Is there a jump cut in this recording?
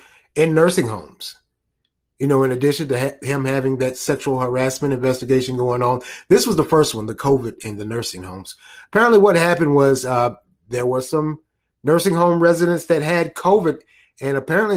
no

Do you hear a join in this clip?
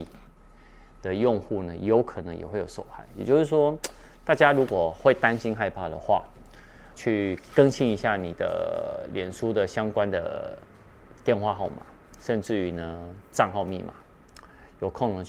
yes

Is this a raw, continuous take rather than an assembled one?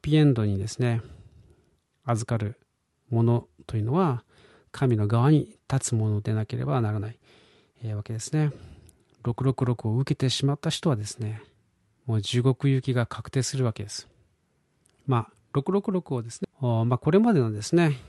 no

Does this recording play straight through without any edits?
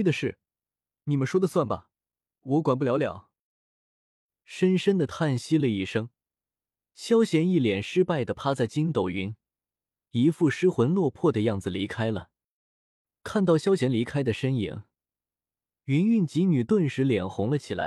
yes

